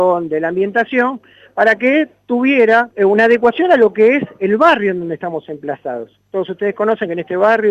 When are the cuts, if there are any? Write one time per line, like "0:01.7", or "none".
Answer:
0:02.9